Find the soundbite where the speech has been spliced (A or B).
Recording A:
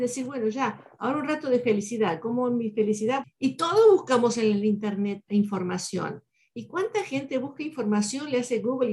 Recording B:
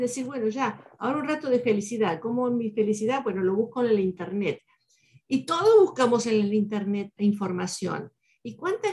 A